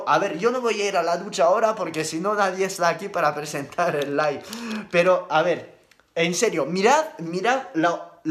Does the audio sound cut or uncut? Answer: uncut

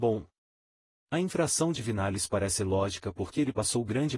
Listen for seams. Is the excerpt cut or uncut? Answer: uncut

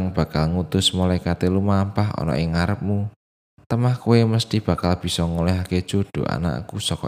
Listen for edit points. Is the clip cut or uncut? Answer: uncut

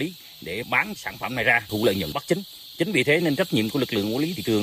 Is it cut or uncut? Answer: uncut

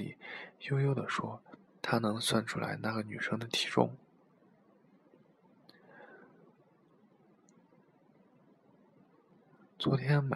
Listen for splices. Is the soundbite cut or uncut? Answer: uncut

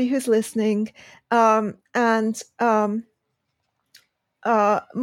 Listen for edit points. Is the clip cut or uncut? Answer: uncut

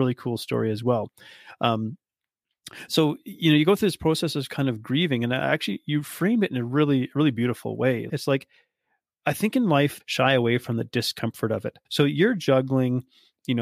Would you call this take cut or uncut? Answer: cut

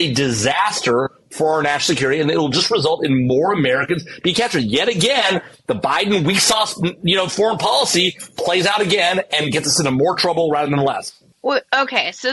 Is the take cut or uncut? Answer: uncut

